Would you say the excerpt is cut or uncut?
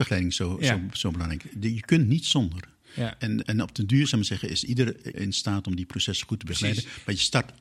cut